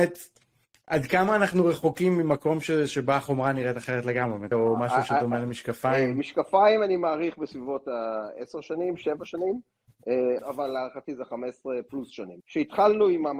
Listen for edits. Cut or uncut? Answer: cut